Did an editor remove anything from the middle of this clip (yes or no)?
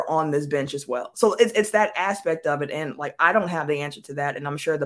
no